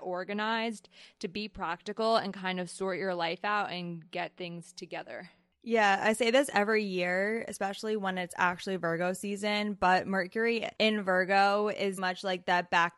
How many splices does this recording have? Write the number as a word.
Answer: two